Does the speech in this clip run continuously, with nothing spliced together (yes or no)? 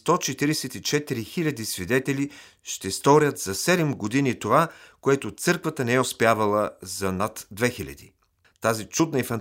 no